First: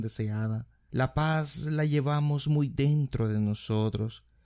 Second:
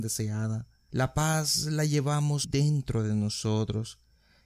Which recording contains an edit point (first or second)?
second